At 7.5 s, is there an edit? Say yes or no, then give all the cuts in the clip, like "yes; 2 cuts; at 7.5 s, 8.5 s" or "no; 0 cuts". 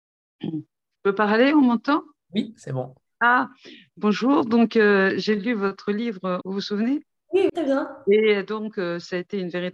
yes; 2 cuts; at 6.4 s, 7.5 s